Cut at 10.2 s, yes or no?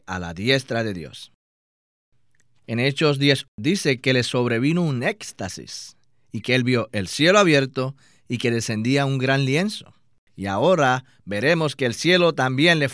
yes